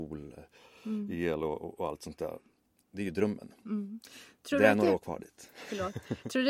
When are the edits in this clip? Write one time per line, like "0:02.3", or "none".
none